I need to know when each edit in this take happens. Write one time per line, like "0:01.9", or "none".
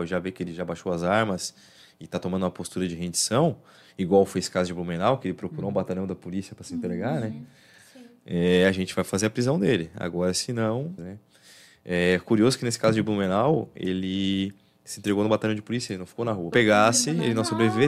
0:11.0
0:16.5